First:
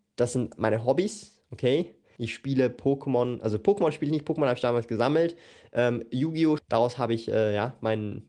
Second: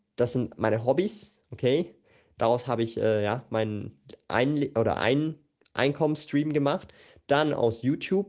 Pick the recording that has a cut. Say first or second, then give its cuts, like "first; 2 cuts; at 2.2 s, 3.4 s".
first; 2 cuts; at 2.2 s, 6.6 s